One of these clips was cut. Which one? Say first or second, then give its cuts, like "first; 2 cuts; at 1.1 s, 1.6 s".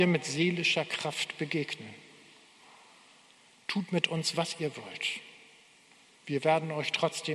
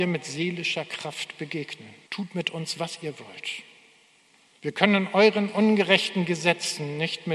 second; 2 cuts; at 2.1 s, 4.5 s